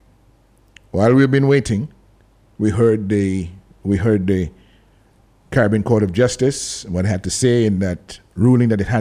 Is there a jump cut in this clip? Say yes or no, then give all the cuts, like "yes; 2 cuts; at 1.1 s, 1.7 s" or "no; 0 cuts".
no; 0 cuts